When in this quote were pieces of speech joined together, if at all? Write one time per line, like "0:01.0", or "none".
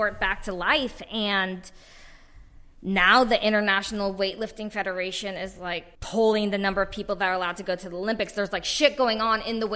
0:05.9